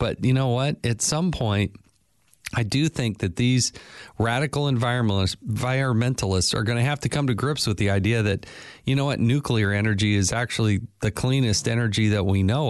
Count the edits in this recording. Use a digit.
0